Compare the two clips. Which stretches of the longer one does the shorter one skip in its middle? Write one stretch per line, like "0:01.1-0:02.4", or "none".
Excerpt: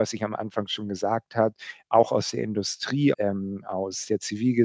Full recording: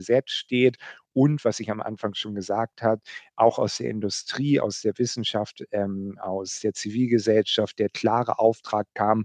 0:04.6-0:05.7